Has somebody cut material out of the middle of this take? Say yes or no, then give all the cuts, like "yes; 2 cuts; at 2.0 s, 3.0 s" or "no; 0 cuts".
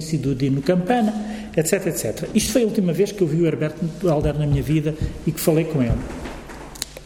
no; 0 cuts